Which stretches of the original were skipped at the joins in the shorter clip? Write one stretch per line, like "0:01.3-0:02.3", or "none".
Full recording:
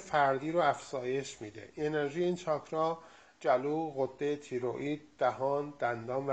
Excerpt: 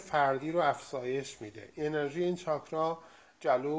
none